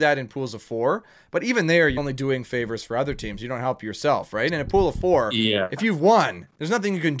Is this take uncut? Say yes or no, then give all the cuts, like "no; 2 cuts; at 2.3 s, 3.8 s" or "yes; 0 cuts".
no; 1 cut; at 2.0 s